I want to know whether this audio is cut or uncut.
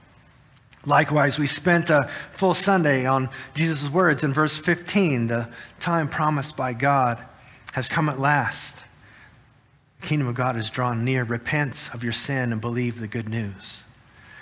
uncut